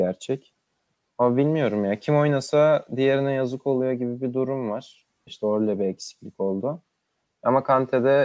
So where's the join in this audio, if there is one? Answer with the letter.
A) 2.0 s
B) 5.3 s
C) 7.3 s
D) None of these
B